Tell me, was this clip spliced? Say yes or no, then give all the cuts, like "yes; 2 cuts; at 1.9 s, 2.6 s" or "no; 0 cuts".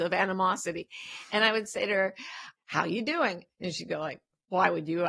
yes; 1 cut; at 2.6 s